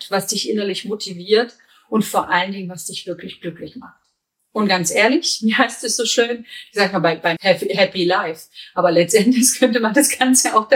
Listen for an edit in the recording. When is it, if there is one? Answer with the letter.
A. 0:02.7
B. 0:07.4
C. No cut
B